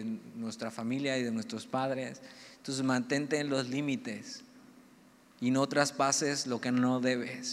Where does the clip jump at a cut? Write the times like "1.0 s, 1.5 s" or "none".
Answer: none